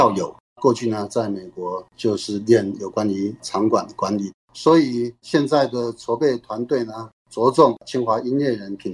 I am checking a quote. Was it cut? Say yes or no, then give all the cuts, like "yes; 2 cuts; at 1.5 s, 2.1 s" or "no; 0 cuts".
yes; 1 cut; at 4.4 s